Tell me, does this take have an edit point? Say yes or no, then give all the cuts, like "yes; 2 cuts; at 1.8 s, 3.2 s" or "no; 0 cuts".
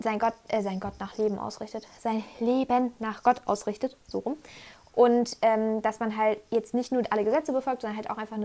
no; 0 cuts